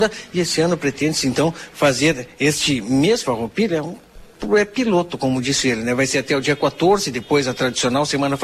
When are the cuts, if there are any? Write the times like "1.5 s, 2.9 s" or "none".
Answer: none

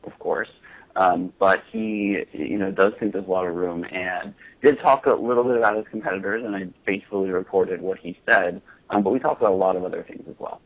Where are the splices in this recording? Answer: none

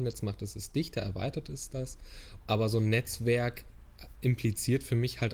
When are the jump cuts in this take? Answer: 2.4 s

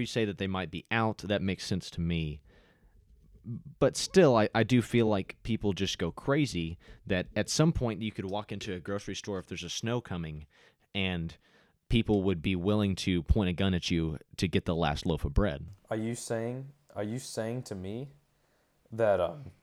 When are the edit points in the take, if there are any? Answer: none

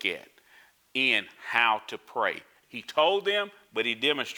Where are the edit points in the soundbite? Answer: 2.6 s

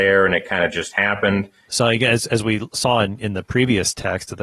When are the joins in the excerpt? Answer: 1.7 s

